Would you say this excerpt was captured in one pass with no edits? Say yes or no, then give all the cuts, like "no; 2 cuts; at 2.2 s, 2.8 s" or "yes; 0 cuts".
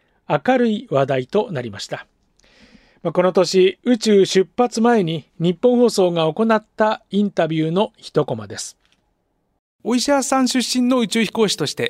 yes; 0 cuts